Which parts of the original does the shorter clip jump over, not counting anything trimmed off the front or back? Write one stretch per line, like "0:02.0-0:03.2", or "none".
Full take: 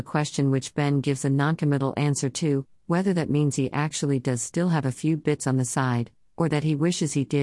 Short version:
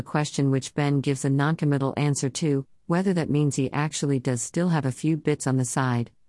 none